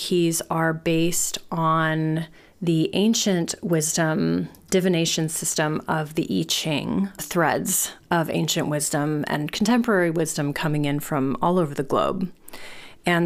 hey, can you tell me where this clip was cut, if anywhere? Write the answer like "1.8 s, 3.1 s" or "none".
7.2 s